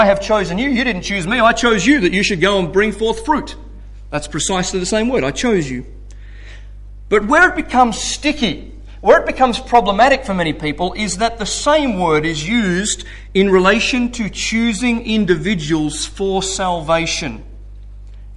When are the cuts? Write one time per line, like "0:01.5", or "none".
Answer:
none